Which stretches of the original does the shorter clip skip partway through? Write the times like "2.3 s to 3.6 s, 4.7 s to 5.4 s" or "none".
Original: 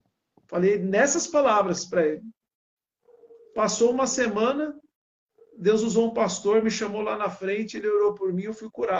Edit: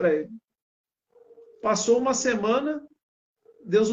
none